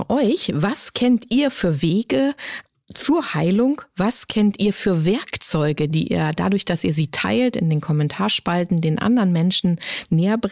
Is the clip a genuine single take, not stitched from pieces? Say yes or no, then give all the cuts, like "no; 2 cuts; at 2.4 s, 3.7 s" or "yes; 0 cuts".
yes; 0 cuts